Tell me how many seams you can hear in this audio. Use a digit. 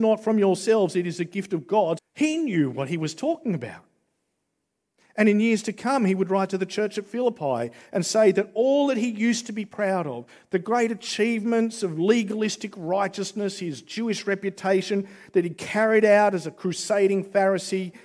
1